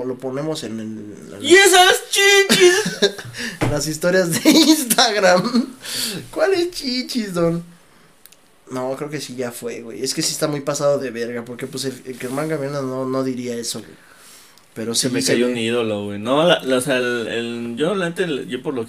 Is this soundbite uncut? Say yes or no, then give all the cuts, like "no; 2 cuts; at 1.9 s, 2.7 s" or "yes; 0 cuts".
yes; 0 cuts